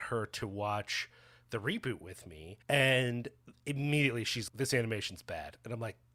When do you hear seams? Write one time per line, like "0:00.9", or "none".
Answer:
0:02.6
0:04.5